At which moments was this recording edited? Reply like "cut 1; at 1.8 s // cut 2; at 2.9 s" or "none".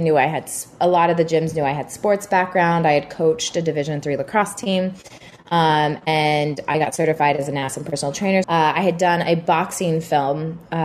cut 1; at 8.4 s